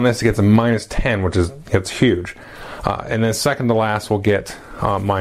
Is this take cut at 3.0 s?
no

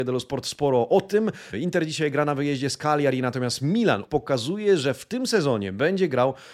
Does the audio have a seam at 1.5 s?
yes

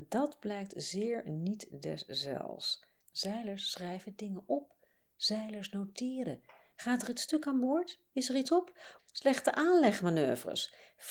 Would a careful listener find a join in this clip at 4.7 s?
no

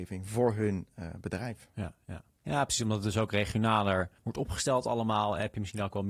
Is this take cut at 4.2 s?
yes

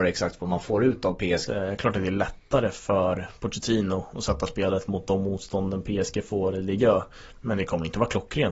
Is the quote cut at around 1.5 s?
yes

